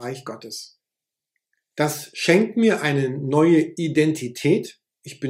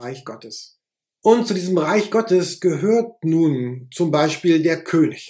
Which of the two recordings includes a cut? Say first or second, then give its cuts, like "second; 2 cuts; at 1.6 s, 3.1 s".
second; 1 cut; at 1.2 s